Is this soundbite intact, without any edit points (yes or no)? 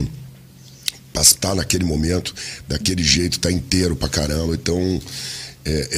yes